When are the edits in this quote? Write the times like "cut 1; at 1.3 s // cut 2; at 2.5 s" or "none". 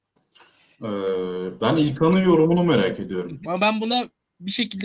cut 1; at 3.4 s